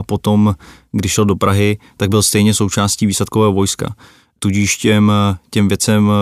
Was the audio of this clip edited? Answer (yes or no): no